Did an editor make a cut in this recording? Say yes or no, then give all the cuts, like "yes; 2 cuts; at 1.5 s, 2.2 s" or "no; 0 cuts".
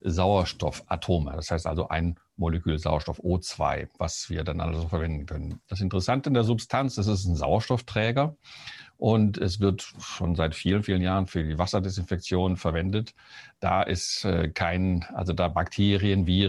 no; 0 cuts